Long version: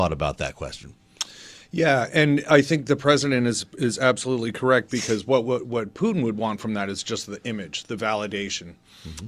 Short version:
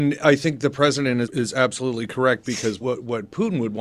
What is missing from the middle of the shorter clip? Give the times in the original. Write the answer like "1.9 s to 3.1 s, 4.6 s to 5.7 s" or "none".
3.5 s to 3.7 s, 5.3 s to 5.4 s